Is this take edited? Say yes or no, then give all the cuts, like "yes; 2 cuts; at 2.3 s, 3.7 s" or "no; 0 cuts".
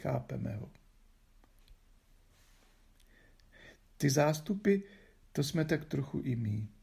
no; 0 cuts